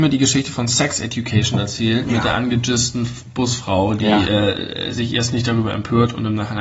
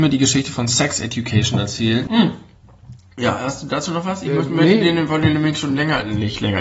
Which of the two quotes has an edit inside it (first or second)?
second